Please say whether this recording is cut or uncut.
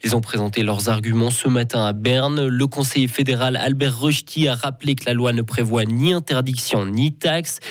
uncut